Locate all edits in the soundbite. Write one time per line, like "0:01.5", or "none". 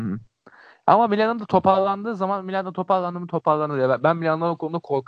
none

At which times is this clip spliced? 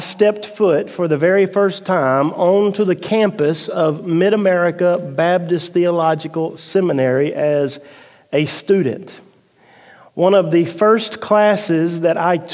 none

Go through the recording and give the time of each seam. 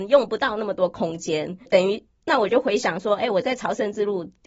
0:01.7

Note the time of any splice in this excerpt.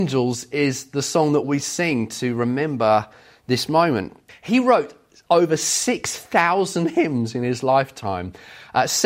0:04.3

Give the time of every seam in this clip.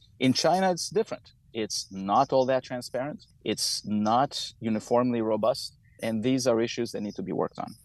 none

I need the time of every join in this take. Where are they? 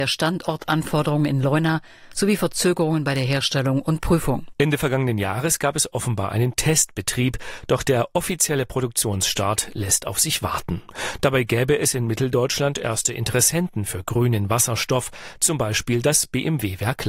none

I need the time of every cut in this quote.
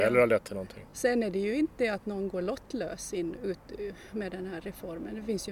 none

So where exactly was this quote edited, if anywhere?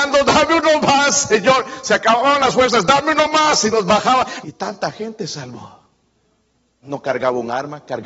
0:04.4
0:06.8

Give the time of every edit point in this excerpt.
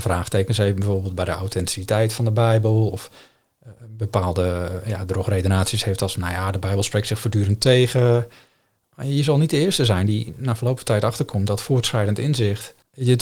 none

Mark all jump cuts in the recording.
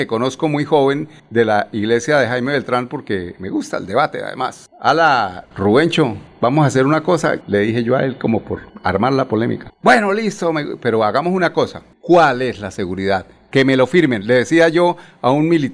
0:07.4
0:11.9

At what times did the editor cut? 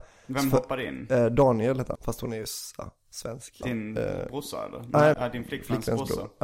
0:02.0
0:03.6
0:05.1

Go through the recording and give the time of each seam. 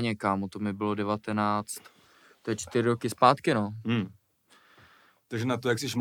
none

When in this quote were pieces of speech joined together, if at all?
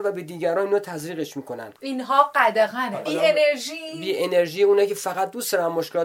0:03.1

